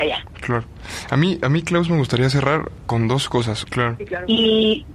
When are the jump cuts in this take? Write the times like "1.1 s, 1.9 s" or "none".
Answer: 3.6 s